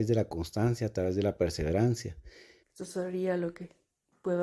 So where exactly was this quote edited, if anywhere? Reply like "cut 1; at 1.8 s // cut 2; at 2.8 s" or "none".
cut 1; at 2.6 s